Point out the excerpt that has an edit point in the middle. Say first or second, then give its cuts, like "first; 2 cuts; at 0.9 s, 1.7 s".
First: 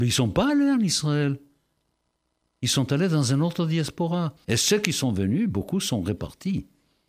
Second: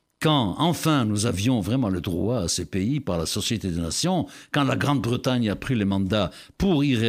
first; 1 cut; at 4.4 s